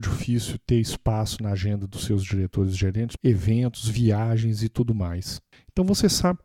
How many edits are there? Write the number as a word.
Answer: one